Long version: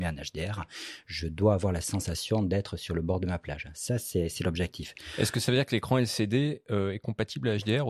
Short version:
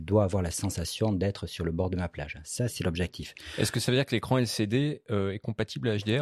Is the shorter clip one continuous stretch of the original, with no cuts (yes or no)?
no